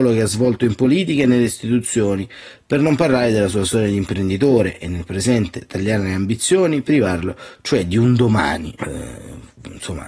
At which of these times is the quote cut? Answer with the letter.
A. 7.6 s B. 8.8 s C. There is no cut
B